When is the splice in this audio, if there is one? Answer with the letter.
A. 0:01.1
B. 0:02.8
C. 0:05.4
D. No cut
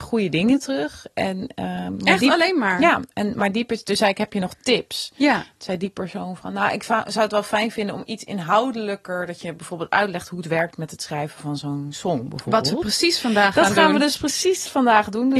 D